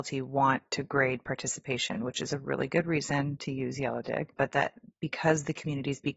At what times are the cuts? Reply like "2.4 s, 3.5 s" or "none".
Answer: none